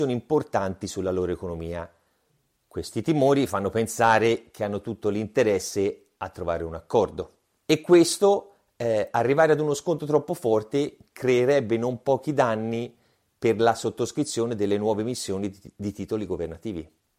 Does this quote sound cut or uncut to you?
cut